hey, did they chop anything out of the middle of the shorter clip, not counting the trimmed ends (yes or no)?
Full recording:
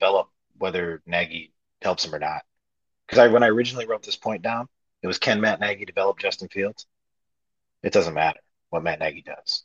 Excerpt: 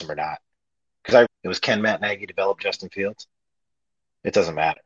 yes